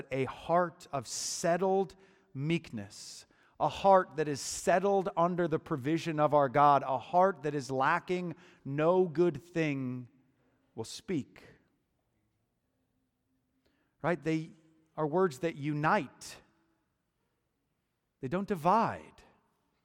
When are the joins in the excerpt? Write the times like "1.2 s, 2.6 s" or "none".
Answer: none